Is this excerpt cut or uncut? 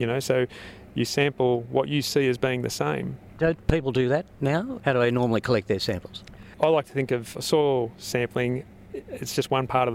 uncut